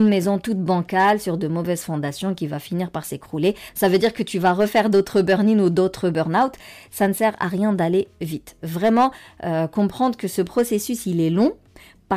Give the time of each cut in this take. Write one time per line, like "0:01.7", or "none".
none